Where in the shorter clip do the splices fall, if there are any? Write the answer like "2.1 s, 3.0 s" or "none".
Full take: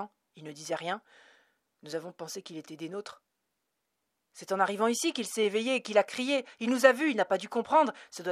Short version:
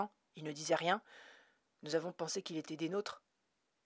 none